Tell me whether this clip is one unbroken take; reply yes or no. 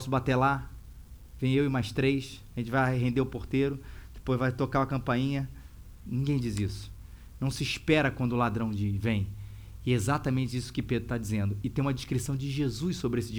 no